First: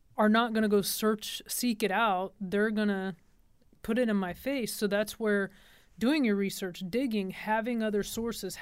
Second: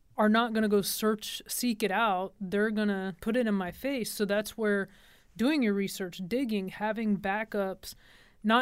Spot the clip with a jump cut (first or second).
second